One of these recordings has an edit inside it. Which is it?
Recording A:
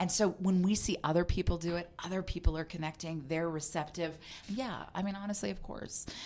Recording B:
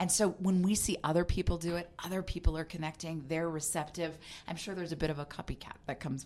A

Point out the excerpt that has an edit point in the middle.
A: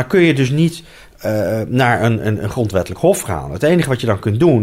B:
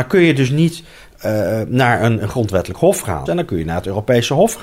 B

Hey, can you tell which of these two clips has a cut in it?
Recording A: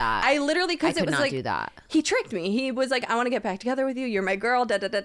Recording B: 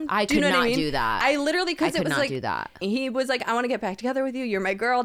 B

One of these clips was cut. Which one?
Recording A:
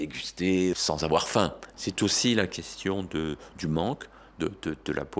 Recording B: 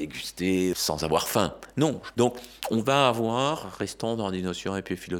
A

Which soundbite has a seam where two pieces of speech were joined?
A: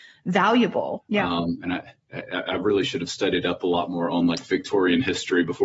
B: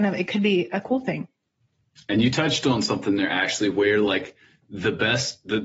A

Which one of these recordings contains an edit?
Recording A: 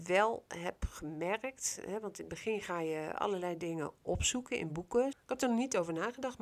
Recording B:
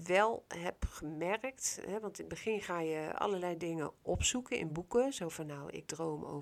A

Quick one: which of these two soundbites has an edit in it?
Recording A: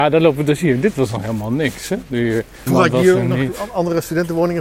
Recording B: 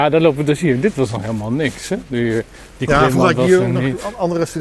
A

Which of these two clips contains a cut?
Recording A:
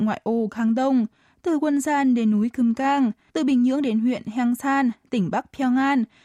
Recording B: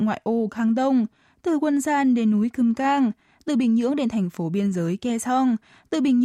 A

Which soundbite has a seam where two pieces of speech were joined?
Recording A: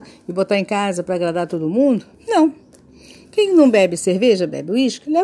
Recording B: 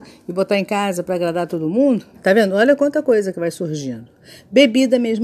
B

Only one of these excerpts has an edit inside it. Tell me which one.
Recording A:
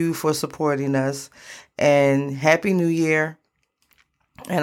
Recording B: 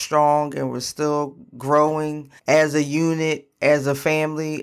B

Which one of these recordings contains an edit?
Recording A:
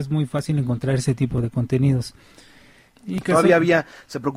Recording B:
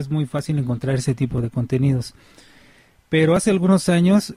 A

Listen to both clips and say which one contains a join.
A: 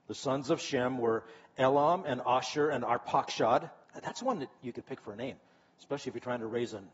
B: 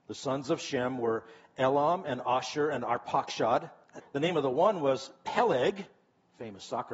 B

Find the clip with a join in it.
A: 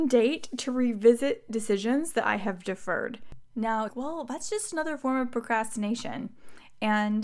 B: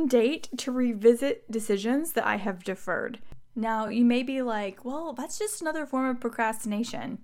A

